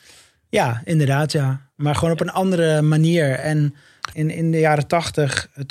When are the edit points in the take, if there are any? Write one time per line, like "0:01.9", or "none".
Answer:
0:04.1